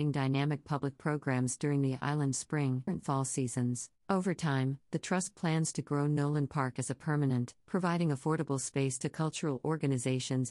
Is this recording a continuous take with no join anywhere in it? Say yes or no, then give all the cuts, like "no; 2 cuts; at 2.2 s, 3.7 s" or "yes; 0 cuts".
no; 3 cuts; at 2.9 s, 4.0 s, 7.6 s